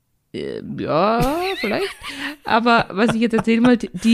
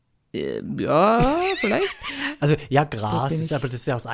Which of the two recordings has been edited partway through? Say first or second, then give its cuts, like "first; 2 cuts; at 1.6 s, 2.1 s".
second; 1 cut; at 2.4 s